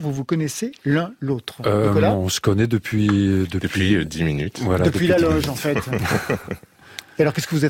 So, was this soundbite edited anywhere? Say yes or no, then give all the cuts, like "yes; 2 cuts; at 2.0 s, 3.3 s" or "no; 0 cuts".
no; 0 cuts